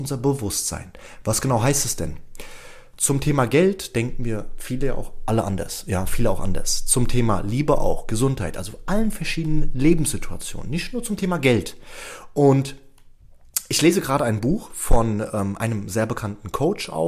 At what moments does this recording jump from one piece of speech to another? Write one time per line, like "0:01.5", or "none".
none

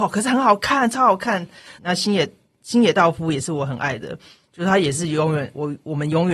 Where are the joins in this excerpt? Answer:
0:01.8

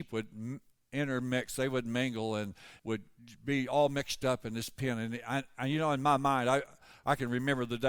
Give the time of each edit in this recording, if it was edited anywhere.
0:02.8

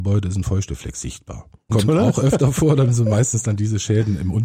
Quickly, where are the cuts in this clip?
0:01.7

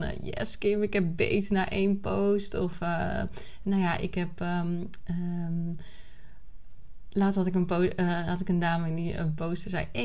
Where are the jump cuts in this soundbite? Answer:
none

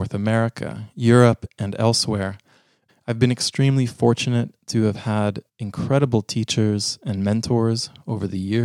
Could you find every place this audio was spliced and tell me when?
0:02.9
0:05.5

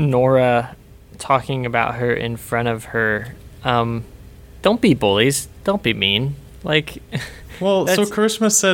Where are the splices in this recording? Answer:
none

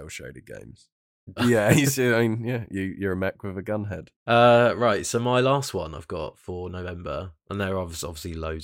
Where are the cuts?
0:01.4
0:04.1

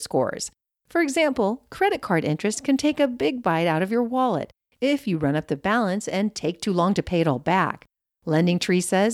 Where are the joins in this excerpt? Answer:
0:08.2

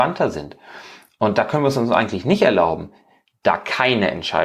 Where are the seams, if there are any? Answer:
none

